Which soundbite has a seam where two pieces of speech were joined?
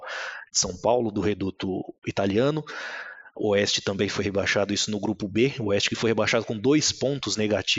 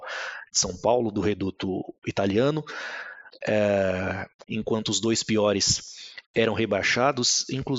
second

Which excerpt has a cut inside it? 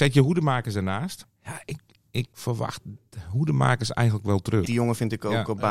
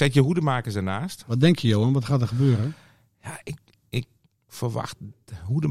first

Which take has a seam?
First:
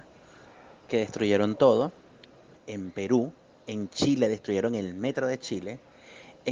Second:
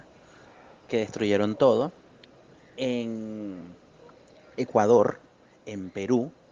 first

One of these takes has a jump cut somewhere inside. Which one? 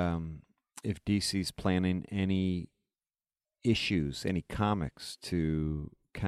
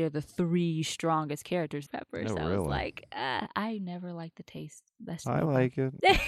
second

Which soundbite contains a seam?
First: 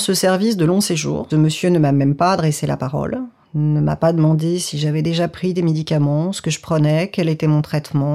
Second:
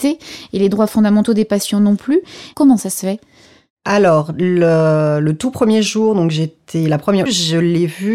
second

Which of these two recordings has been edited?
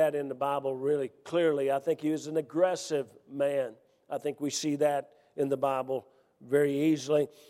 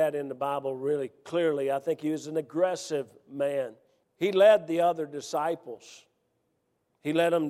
second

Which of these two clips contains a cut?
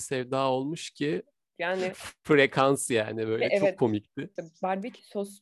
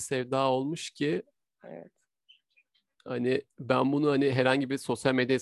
first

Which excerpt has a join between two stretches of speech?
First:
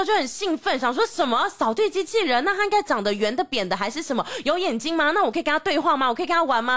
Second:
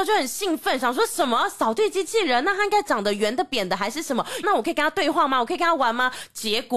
second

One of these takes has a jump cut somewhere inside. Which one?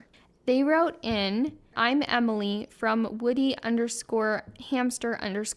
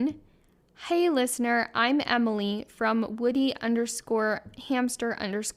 first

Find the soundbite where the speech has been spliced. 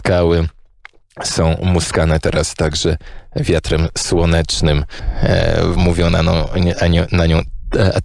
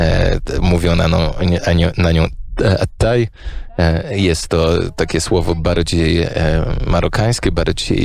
first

